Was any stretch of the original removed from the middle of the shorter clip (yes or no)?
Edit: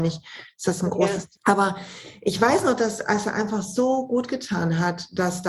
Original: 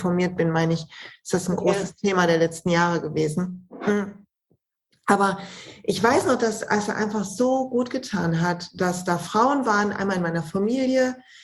yes